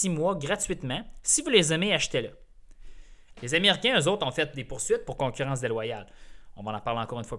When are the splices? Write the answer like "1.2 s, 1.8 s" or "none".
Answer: 3.3 s